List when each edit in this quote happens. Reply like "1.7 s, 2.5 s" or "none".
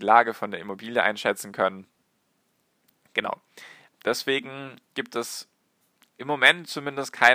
3.9 s